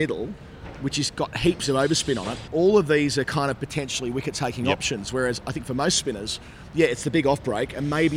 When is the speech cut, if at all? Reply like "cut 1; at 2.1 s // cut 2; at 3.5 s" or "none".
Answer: cut 1; at 2.5 s